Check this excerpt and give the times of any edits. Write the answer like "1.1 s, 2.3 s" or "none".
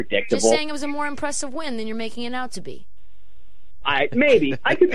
3.8 s